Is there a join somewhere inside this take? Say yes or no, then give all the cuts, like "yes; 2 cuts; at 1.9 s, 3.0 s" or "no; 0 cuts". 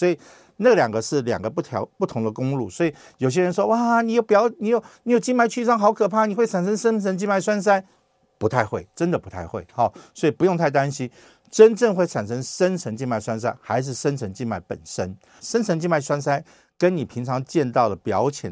yes; 1 cut; at 15.4 s